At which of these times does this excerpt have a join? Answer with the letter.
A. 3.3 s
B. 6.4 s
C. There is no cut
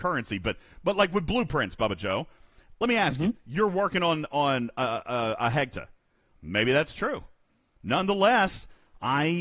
B